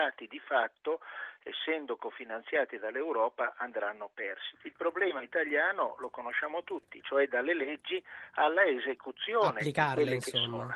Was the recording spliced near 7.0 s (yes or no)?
yes